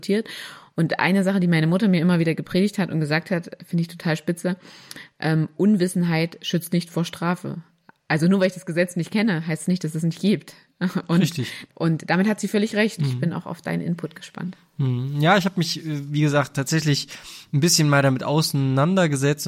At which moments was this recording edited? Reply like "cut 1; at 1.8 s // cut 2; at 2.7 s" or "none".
cut 1; at 11.7 s // cut 2; at 13.0 s